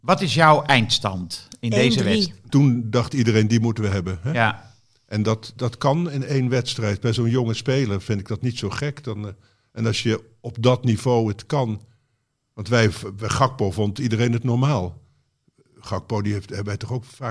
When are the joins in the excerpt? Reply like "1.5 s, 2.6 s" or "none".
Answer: 2.5 s